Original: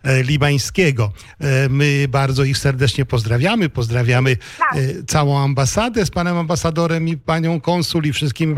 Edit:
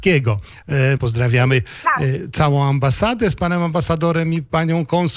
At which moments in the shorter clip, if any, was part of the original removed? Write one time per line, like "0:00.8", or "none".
0:01.0